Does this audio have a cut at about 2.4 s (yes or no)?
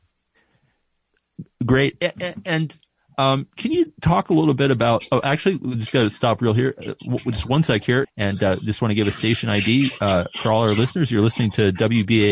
no